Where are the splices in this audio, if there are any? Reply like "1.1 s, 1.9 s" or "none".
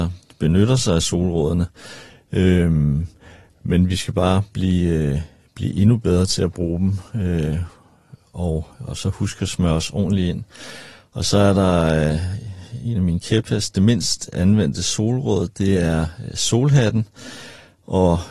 none